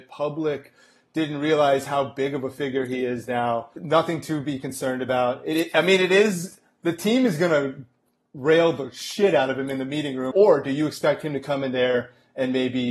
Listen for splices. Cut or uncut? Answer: cut